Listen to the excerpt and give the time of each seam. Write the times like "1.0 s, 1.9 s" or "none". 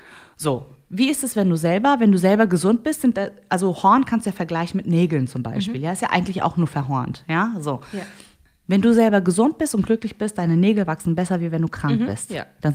none